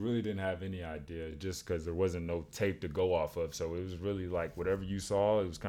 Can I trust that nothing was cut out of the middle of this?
yes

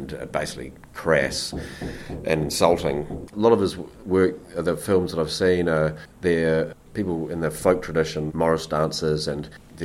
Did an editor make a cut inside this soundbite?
yes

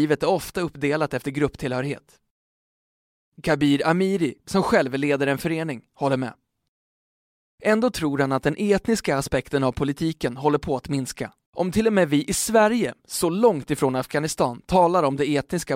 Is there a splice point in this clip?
yes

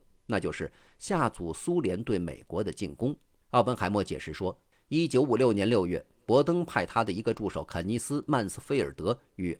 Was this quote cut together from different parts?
yes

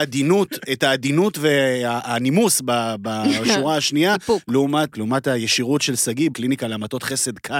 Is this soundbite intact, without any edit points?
no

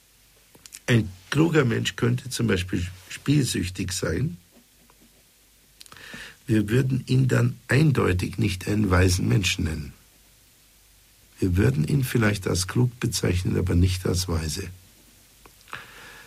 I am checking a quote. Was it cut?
yes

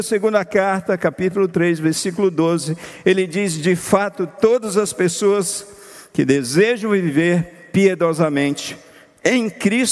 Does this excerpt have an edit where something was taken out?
no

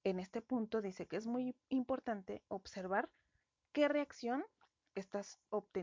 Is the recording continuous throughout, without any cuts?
yes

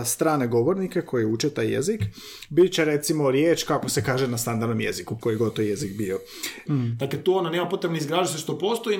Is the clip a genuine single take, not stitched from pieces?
no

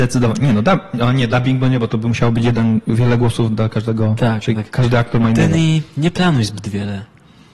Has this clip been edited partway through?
no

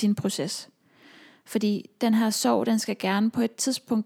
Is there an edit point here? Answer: no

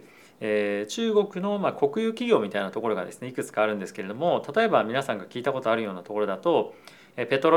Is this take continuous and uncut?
yes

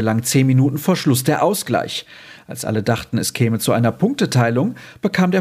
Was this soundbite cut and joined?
no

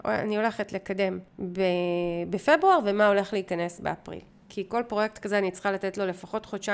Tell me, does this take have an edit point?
no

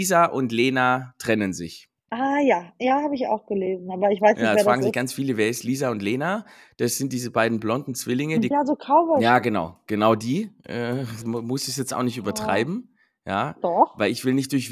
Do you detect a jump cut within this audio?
yes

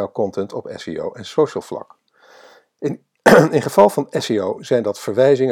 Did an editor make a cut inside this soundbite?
no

